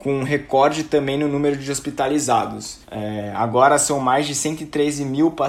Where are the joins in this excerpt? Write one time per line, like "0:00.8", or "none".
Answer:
0:02.8